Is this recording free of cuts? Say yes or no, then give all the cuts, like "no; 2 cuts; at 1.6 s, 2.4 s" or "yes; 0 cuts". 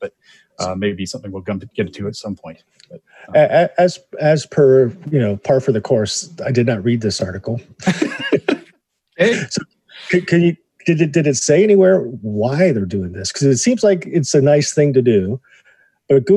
yes; 0 cuts